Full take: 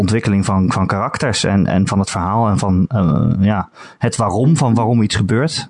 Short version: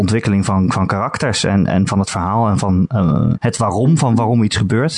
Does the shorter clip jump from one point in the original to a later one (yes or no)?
yes